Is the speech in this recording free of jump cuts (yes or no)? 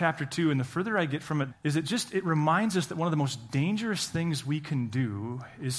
no